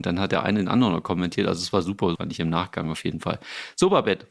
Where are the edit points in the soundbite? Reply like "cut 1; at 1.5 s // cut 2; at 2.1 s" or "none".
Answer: cut 1; at 2.1 s

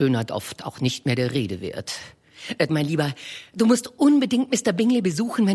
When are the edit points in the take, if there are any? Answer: cut 1; at 2.7 s

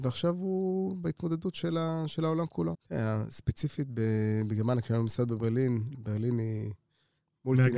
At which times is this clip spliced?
cut 1; at 2.7 s // cut 2; at 5.9 s

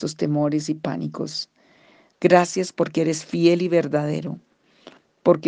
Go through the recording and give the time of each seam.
cut 1; at 2.1 s

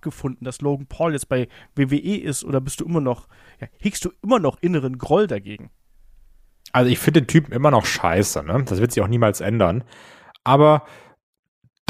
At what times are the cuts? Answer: none

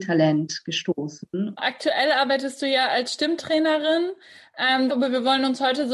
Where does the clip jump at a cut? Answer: cut 1; at 1.6 s // cut 2; at 4.9 s

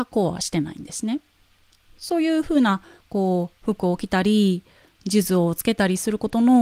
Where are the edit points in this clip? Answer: none

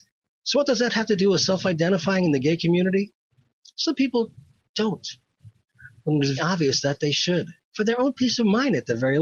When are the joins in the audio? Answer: cut 1; at 6.4 s // cut 2; at 7.6 s

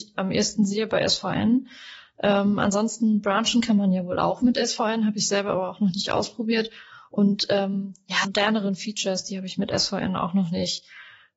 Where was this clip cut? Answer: cut 1; at 8.2 s

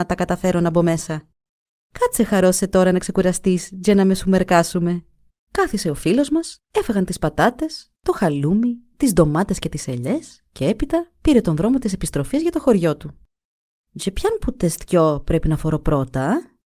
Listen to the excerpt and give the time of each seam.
cut 1; at 5.3 s // cut 2; at 13.9 s

